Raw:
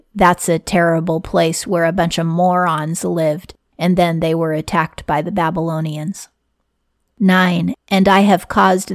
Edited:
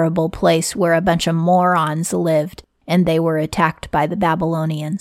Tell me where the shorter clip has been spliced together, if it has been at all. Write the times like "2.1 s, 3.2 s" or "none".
3.0 s